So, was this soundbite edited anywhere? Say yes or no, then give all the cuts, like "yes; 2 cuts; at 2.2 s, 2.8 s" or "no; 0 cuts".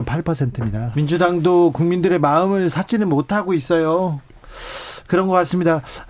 yes; 1 cut; at 0.9 s